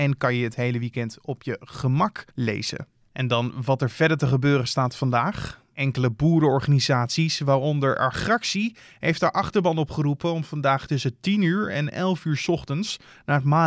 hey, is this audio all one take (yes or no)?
no